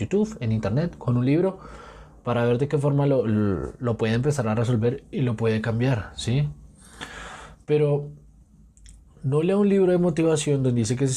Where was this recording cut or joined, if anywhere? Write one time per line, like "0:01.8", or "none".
none

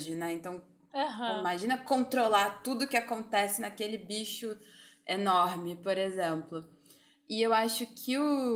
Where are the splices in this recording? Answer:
none

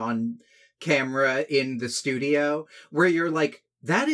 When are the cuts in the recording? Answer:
none

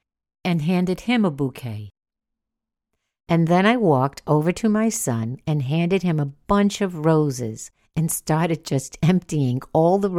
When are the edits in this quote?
none

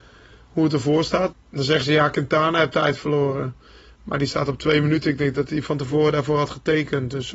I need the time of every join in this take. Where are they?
0:01.3

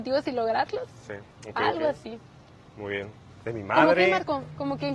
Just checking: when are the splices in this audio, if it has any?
0:01.3
0:03.4

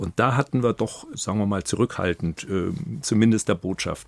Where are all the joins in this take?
0:01.1
0:03.0

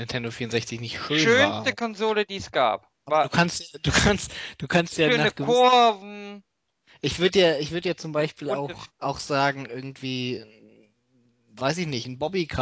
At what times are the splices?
0:08.9

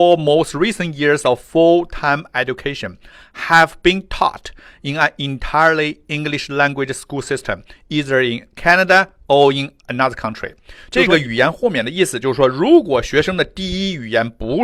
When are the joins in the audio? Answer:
none

